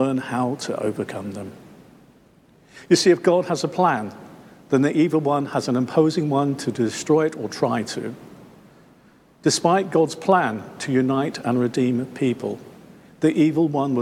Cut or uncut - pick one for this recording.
uncut